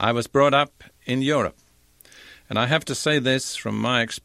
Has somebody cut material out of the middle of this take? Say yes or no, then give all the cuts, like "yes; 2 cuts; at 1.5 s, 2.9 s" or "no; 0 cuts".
no; 0 cuts